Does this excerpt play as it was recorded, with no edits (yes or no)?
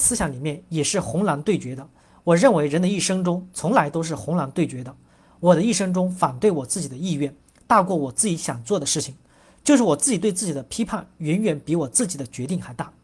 yes